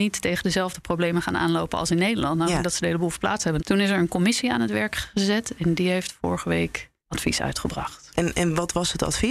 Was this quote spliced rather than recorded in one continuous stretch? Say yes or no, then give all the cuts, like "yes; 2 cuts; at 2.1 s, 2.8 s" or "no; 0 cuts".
yes; 2 cuts; at 3.6 s, 7.0 s